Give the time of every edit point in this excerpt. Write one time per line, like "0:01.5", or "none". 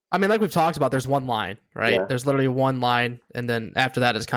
none